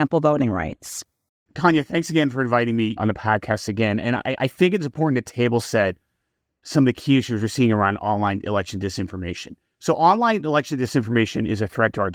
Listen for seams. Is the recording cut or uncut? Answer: uncut